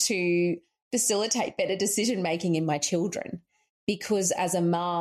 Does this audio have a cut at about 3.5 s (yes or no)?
no